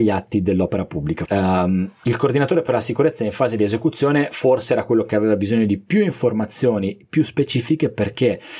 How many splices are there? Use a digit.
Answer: 1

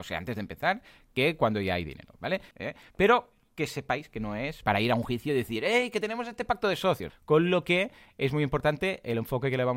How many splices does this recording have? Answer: 3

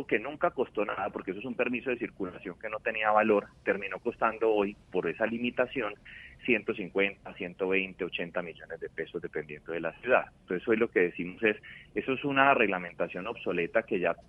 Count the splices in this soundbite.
0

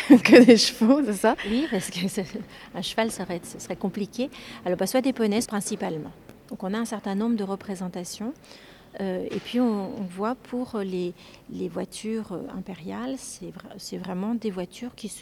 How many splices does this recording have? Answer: 2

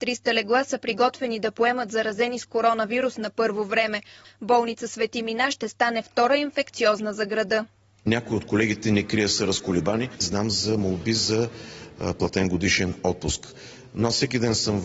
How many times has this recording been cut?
1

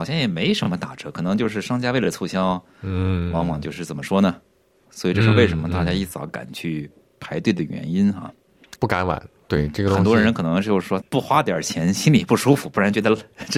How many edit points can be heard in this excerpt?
3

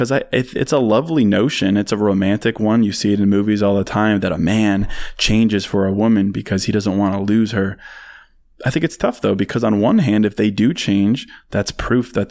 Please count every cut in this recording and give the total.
0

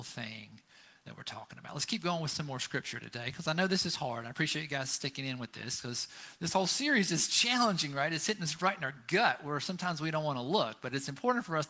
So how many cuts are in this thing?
0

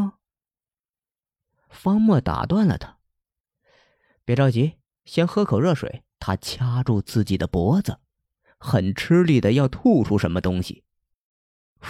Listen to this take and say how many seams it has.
1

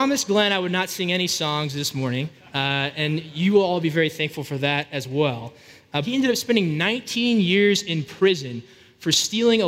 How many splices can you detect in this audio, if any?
1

